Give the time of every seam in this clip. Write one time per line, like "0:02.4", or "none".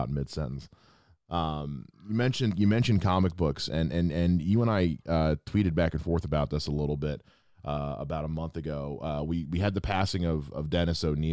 none